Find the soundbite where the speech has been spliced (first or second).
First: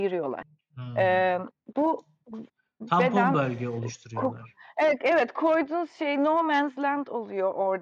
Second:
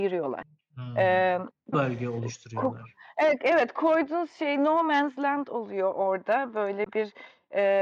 second